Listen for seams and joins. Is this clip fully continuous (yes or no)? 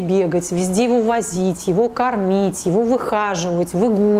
yes